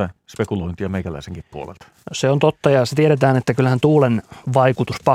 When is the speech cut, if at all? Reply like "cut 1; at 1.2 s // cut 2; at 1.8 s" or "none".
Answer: none